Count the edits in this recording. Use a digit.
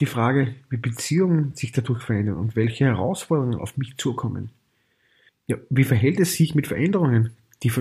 1